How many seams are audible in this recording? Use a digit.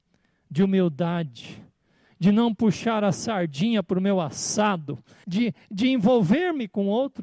1